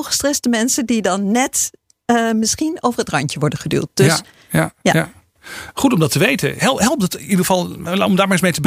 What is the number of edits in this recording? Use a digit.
0